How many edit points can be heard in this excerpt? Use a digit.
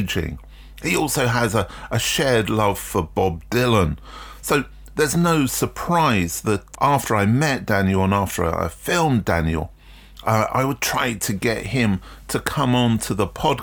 1